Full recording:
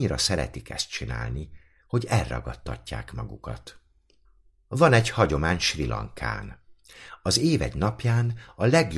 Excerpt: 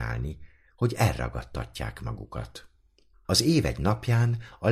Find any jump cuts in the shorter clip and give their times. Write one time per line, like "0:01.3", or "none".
0:03.2